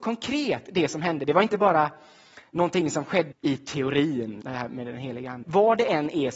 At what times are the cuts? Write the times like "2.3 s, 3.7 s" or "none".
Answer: 3.3 s, 4.4 s, 5.4 s